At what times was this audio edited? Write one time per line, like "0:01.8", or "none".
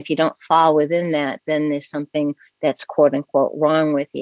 none